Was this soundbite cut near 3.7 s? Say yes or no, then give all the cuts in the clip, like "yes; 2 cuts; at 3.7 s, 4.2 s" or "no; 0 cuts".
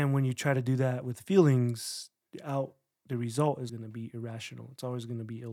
yes; 2 cuts; at 2.2 s, 3.7 s